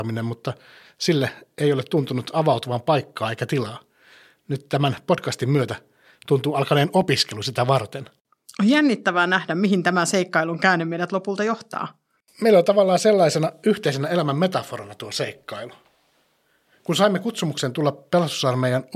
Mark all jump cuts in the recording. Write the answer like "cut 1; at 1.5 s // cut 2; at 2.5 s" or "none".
none